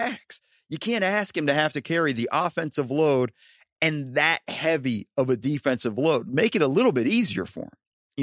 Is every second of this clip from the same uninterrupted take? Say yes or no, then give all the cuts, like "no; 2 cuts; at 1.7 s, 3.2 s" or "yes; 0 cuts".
yes; 0 cuts